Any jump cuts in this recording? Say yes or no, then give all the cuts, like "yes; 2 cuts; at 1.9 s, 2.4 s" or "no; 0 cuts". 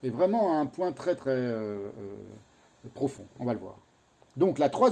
yes; 1 cut; at 1.2 s